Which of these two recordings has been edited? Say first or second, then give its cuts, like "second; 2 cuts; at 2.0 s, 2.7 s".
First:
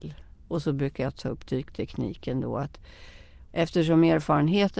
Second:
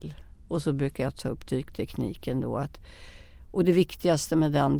first; 1 cut; at 3.5 s